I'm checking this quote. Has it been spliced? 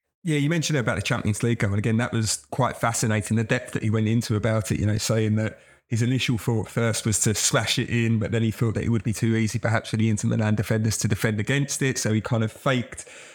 no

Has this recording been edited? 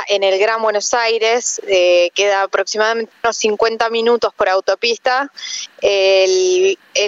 no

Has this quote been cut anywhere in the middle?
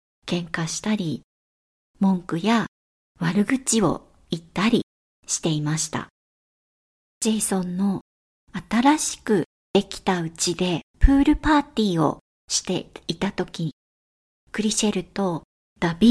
yes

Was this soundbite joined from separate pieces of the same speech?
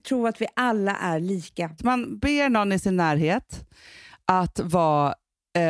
yes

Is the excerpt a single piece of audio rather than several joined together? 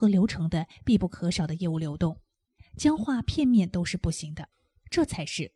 yes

